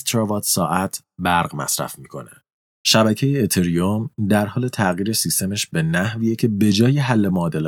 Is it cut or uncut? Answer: cut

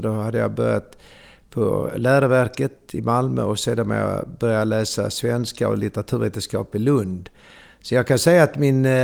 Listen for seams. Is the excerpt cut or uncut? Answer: uncut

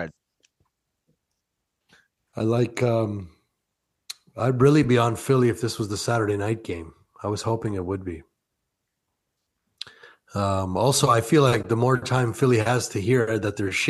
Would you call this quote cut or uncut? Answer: uncut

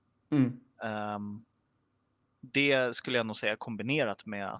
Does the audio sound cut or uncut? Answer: uncut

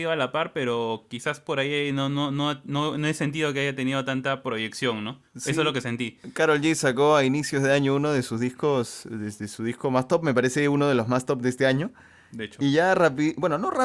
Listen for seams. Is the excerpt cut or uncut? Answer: uncut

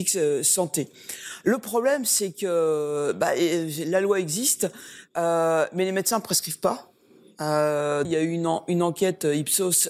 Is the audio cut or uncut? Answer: cut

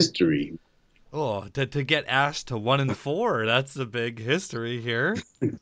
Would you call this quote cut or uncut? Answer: uncut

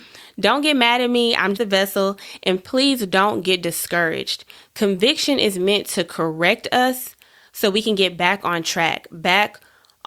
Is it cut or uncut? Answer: cut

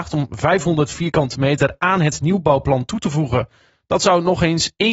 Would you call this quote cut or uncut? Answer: uncut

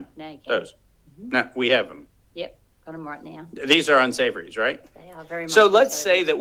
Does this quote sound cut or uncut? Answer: uncut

